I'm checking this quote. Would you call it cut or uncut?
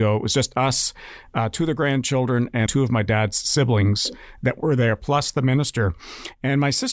cut